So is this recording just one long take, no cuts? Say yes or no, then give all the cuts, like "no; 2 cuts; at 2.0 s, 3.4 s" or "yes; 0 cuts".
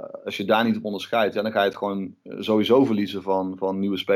yes; 0 cuts